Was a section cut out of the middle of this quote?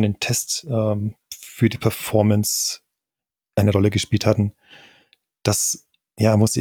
no; 0 cuts

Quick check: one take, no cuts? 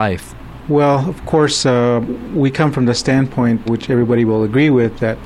no; 1 cut; at 3.7 s

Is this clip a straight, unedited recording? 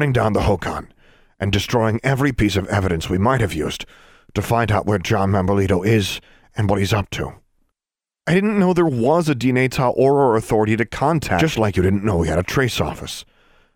yes; 0 cuts

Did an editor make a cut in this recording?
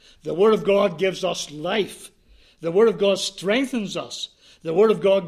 no; 0 cuts

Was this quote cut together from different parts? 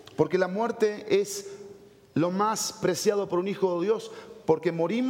no; 0 cuts

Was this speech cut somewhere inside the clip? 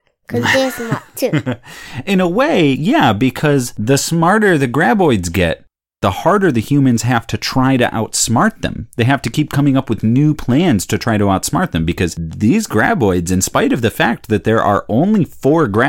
no; 0 cuts

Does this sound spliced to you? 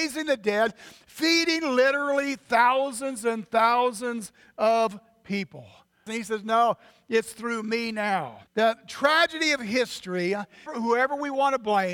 yes; 3 cuts; at 6.1 s, 8.5 s, 10.7 s

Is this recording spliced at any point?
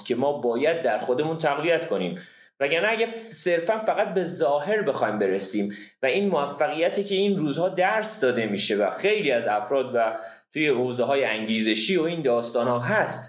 no; 0 cuts

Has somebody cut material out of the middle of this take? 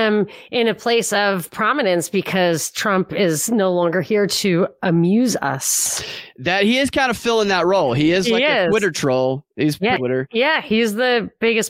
yes; 1 cut; at 10.0 s

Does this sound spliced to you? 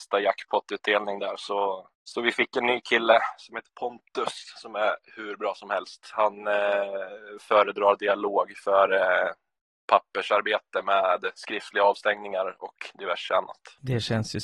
no; 0 cuts

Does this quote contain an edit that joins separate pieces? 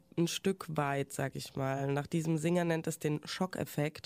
no; 0 cuts

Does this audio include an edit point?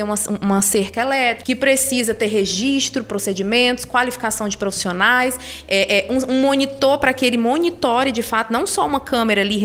no; 0 cuts

